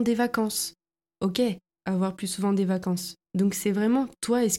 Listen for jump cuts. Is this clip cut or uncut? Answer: cut